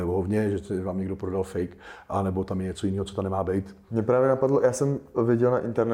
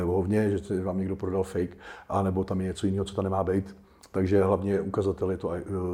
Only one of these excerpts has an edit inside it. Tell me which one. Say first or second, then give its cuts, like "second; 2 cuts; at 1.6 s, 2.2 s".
first; 1 cut; at 3.9 s